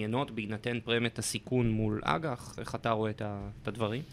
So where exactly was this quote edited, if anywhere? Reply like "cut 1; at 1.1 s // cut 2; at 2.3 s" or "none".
none